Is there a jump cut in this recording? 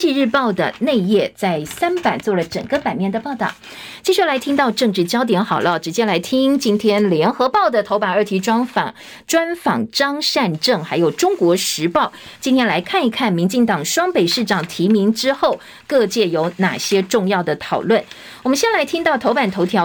no; 0 cuts

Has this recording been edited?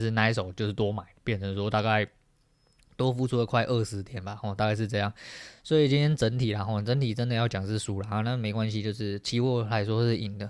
no; 0 cuts

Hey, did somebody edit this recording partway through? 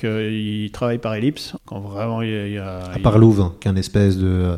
yes; 1 cut; at 1.6 s

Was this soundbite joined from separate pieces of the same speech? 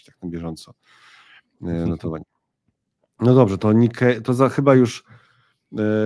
no; 0 cuts

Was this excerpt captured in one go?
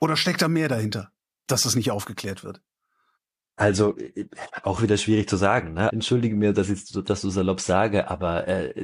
no; 1 cut; at 5.9 s

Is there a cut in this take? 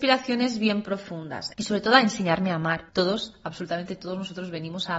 yes; 2 cuts; at 1.5 s, 2.9 s

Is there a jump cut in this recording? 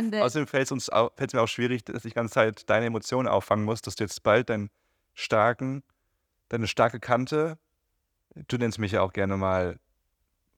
no; 0 cuts

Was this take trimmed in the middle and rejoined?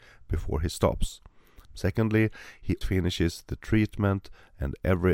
yes; 2 cuts; at 1.6 s, 2.8 s

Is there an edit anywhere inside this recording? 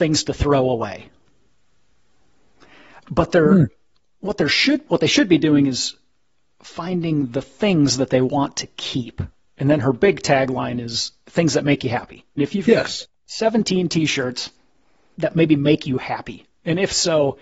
yes; 2 cuts; at 12.4 s, 15.1 s

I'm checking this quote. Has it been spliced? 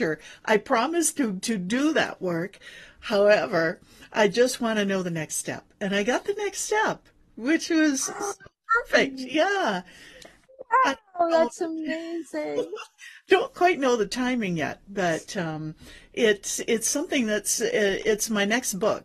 no; 0 cuts

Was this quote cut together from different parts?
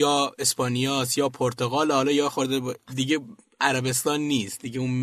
yes; 1 cut; at 2.9 s

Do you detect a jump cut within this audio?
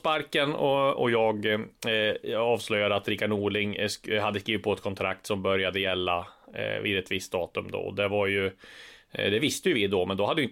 no; 0 cuts

